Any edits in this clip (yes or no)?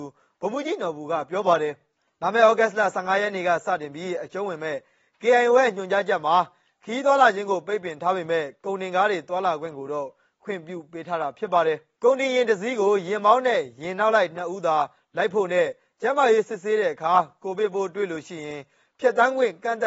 no